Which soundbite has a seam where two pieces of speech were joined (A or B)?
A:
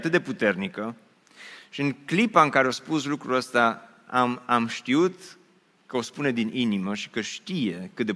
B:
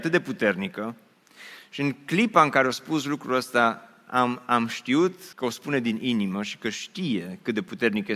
B